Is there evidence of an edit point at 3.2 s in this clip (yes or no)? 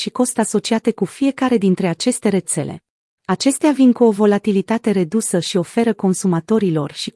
yes